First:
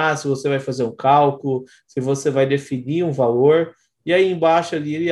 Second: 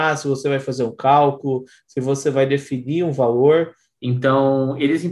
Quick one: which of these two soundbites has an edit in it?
second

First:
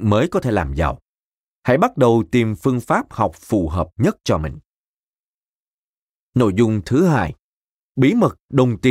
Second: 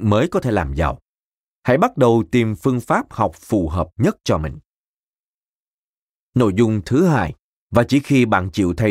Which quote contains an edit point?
second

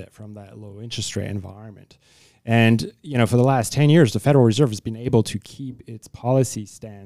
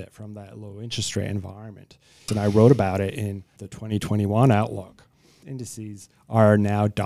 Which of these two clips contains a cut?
second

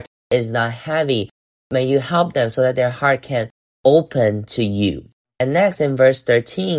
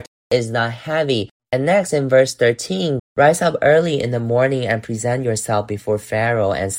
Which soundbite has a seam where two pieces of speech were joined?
second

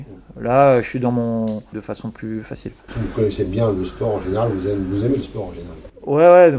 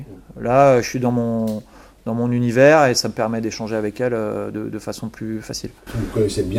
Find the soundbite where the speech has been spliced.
first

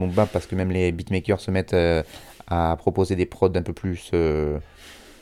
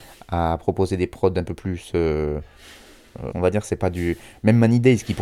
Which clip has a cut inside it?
second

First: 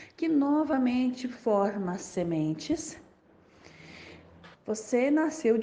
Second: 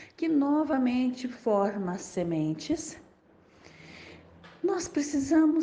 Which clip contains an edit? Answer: first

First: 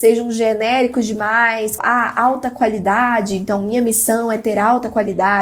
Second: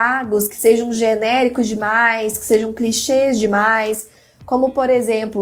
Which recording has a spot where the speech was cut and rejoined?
first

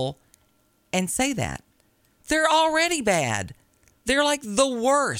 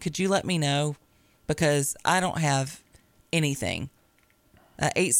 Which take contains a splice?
first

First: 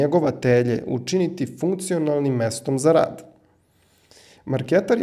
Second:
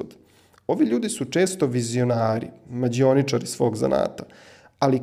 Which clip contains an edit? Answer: second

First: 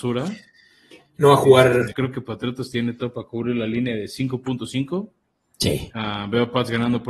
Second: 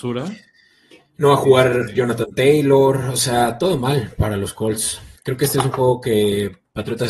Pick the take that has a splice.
first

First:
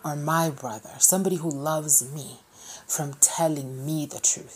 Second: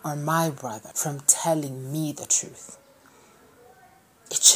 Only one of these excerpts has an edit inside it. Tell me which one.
second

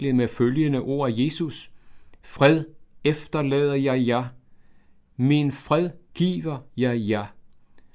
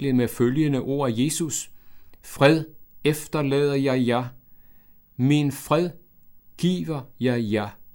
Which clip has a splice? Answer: first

